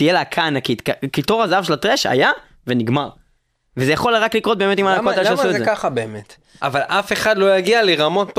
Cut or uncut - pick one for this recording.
cut